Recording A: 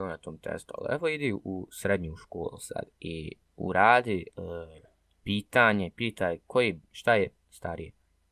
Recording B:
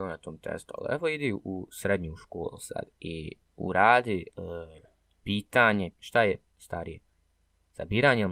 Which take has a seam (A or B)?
B